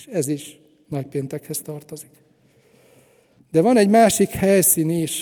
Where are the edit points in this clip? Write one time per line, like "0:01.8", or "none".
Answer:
none